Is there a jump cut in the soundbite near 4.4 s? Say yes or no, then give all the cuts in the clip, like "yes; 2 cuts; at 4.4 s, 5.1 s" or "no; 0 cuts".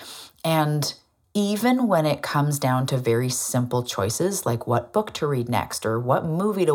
no; 0 cuts